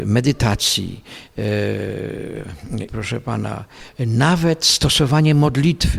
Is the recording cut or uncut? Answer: cut